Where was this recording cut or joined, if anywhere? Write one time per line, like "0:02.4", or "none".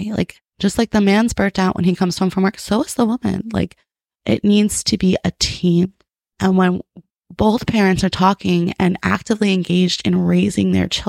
0:06.2